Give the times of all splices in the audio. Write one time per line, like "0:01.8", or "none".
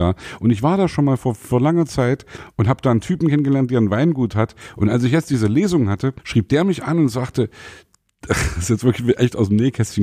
none